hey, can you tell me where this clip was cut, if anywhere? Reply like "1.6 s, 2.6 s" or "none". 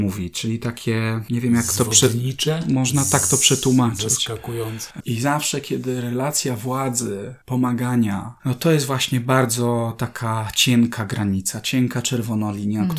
5.0 s, 8.4 s